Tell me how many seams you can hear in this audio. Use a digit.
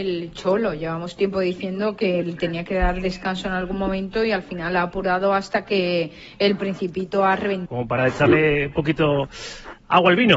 1